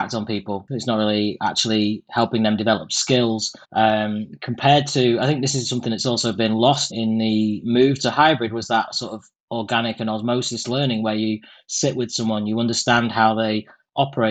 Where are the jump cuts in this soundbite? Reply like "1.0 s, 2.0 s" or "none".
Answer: 3.6 s, 6.9 s